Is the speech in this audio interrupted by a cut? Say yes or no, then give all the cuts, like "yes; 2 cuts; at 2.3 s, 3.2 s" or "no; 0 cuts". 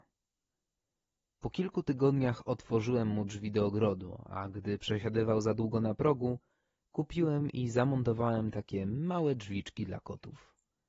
no; 0 cuts